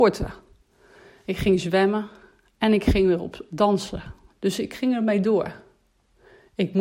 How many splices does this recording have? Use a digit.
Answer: 1